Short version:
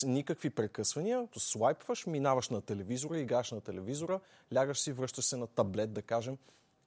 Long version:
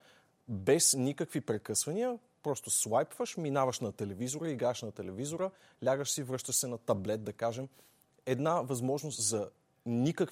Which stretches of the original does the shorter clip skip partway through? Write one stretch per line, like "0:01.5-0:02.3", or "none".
0:02.2-0:02.6